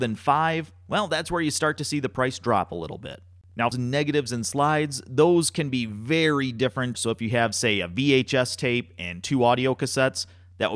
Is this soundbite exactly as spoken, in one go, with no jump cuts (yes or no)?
no